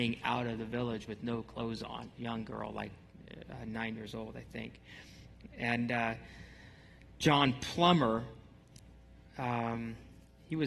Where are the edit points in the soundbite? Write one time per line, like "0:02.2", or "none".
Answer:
none